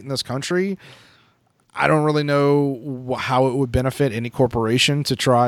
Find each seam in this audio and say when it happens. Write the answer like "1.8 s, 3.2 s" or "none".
none